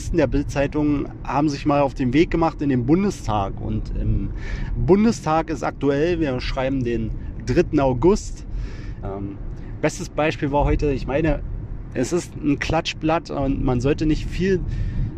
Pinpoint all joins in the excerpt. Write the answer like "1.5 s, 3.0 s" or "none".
9.0 s